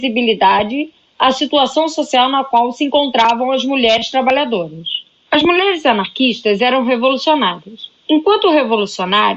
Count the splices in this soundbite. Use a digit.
0